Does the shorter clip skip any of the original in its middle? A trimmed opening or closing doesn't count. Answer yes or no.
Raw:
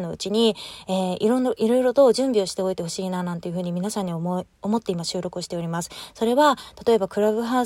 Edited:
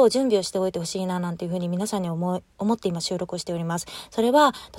no